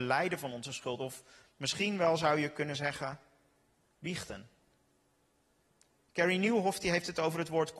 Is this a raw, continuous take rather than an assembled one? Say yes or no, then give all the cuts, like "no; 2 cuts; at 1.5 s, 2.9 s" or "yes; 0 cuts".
yes; 0 cuts